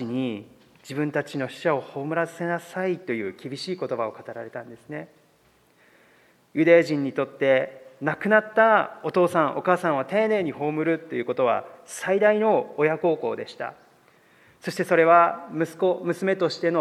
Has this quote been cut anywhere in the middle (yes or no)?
no